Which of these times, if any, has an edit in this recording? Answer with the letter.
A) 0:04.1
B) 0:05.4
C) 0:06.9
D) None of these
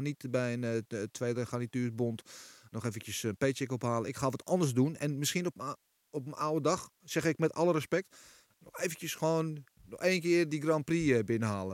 D